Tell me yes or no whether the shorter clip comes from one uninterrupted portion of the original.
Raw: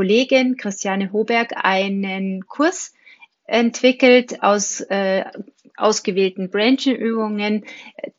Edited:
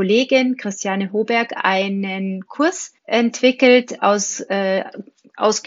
no